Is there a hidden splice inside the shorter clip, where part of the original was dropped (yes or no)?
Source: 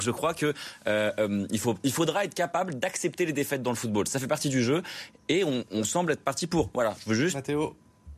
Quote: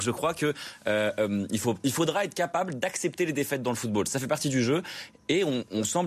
no